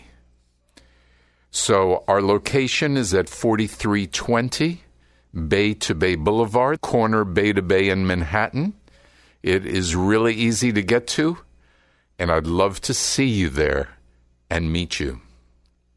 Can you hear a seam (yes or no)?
yes